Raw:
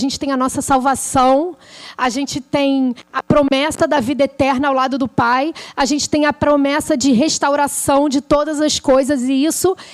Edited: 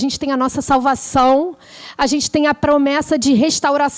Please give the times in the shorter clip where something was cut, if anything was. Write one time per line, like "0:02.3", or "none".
0:02.0